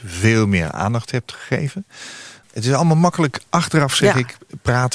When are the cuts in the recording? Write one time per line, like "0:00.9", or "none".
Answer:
0:02.4